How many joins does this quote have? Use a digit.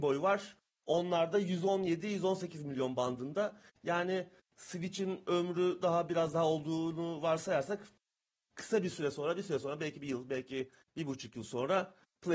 0